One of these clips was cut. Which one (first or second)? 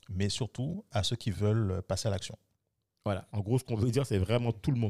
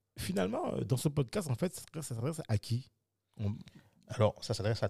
first